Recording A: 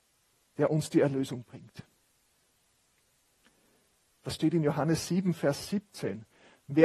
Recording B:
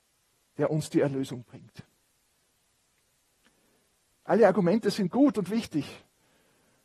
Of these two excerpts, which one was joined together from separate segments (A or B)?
B